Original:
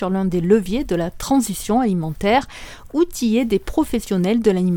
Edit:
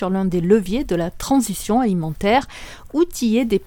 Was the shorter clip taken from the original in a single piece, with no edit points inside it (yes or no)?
yes